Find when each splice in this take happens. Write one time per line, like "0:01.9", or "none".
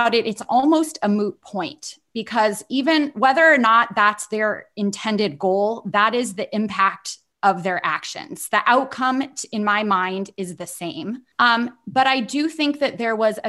0:11.3